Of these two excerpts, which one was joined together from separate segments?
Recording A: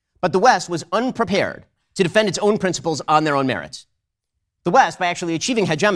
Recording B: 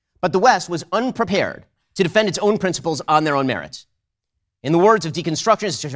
B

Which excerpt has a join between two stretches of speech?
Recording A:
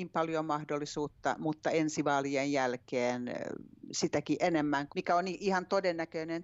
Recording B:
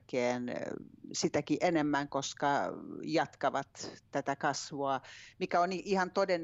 A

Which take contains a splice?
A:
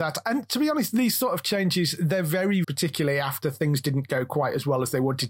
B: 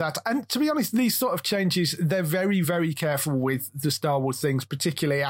A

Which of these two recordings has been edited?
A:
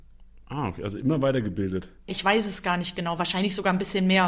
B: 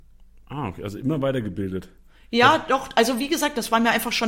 A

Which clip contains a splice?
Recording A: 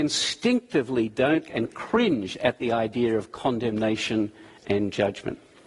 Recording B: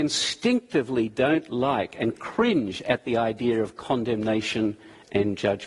A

